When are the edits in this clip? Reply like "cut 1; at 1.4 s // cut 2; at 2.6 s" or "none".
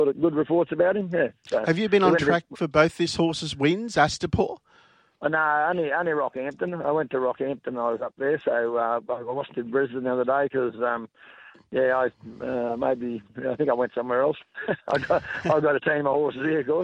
none